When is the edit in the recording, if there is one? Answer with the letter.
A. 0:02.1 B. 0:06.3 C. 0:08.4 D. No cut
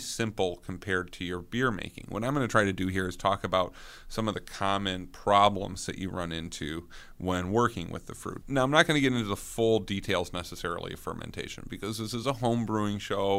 C